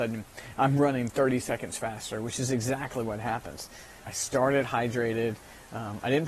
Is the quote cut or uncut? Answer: cut